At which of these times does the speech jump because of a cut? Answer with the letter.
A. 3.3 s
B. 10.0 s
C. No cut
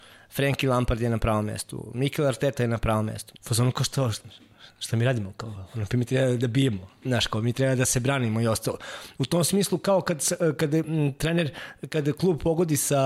A